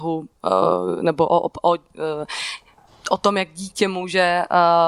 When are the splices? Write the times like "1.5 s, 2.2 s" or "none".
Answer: none